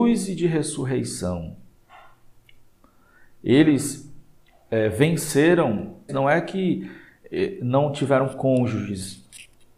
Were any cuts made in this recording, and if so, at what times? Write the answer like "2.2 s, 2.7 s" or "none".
6.1 s

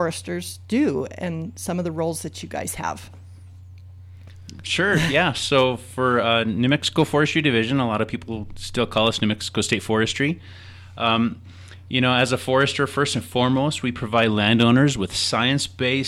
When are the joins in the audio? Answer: none

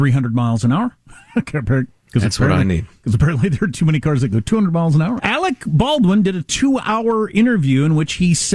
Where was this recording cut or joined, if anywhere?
5.2 s

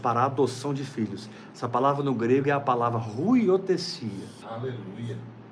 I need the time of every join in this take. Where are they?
4.4 s

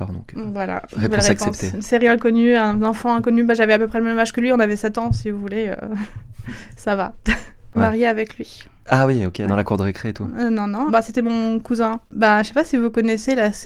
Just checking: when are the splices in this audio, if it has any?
7.7 s, 10.9 s, 12.1 s

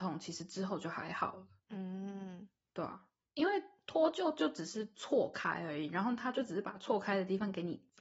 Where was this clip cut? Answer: none

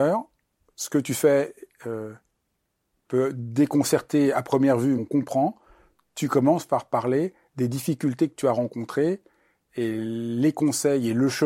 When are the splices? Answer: 5.0 s

